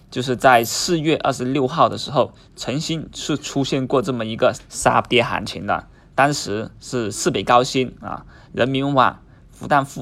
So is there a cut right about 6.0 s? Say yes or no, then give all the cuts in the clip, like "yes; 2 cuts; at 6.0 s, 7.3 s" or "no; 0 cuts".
no; 1 cut; at 4.5 s